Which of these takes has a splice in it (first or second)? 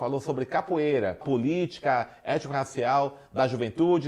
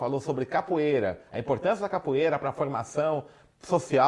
first